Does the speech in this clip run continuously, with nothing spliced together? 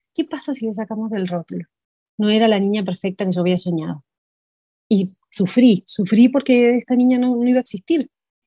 no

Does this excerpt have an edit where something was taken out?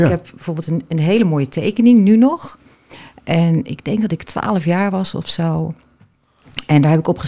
no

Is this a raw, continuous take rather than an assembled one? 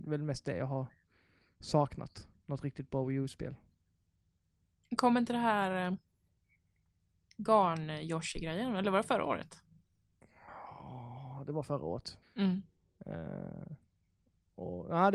no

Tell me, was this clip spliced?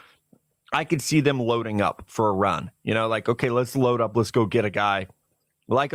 no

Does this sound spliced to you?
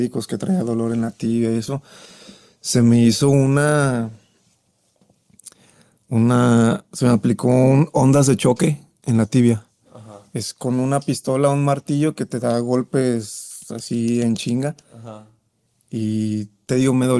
no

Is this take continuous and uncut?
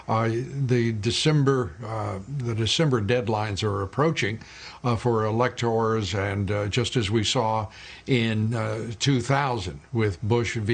yes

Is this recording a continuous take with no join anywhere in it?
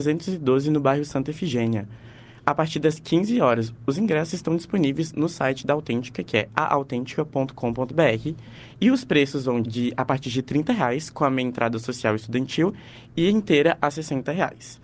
no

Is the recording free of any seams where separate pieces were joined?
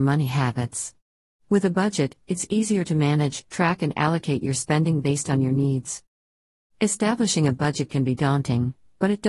yes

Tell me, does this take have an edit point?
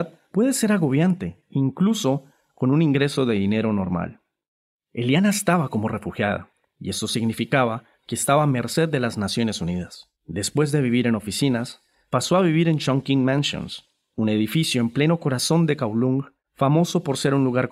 yes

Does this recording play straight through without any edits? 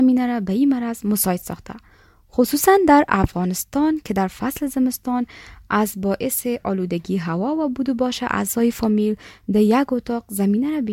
yes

